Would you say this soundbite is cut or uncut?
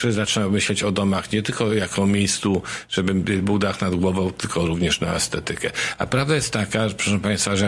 uncut